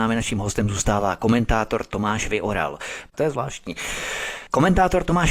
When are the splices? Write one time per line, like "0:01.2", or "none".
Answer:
0:03.1